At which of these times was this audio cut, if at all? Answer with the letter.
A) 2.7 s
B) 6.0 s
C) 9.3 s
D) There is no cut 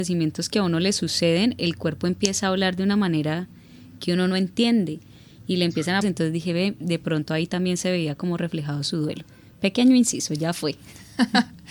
B